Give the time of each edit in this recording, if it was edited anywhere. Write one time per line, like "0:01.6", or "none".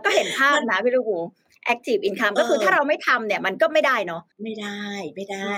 0:04.3